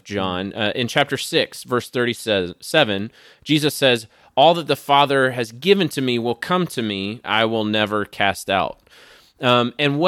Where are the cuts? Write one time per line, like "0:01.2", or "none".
0:07.2